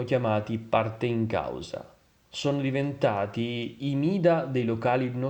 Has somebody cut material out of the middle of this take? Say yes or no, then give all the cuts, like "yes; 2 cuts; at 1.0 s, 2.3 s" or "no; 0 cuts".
no; 0 cuts